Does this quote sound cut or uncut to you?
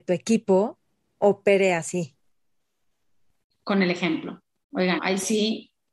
cut